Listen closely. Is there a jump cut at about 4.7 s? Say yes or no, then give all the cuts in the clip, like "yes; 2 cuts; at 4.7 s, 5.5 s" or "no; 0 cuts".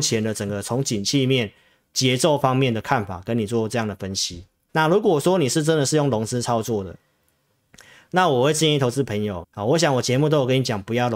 yes; 2 cuts; at 4.7 s, 9.4 s